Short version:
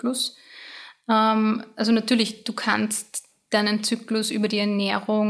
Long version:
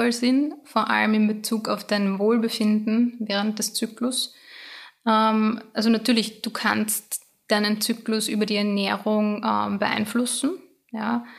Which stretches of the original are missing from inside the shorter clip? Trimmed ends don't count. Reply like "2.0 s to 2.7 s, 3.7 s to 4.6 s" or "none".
none

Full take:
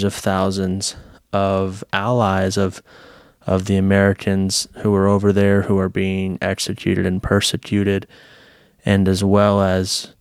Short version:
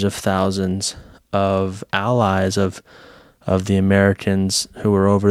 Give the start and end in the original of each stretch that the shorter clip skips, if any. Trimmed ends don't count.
none

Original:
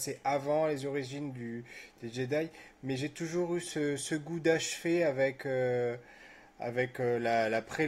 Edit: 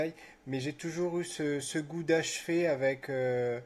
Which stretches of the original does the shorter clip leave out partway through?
none

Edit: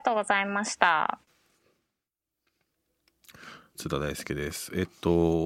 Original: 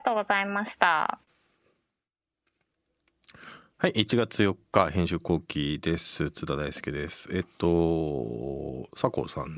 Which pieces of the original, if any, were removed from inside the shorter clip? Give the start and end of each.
3.7 s to 6.3 s

